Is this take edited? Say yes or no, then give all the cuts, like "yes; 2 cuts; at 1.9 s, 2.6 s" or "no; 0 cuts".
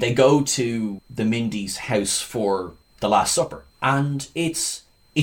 yes; 1 cut; at 3.7 s